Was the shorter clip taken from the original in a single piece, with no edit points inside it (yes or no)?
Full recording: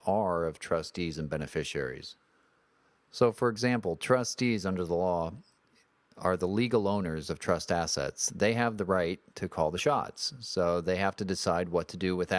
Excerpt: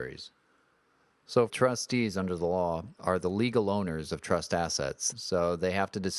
no